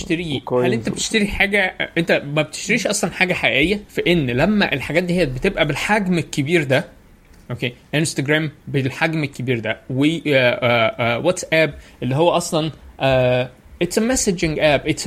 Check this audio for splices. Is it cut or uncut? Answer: cut